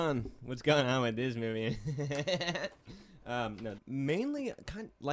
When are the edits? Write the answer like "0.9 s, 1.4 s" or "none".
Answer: 3.8 s